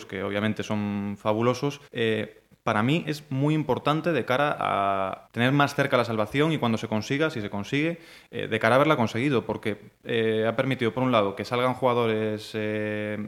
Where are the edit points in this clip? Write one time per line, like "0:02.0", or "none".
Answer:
0:01.9
0:05.3